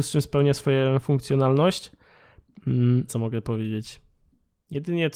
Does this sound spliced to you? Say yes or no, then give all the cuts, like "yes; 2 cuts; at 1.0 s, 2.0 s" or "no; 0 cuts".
yes; 1 cut; at 3.1 s